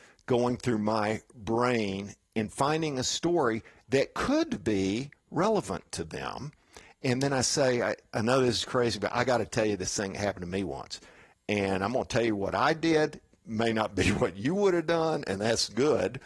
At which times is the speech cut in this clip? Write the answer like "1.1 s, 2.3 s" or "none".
none